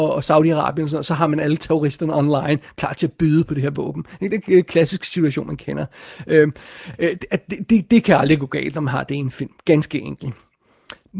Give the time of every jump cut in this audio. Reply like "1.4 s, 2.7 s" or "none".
none